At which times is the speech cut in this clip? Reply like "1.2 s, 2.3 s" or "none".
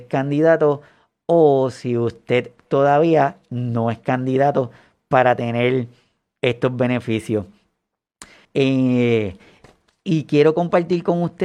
8.5 s